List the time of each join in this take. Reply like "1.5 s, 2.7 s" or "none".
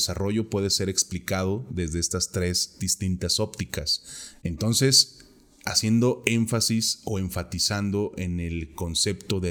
4.4 s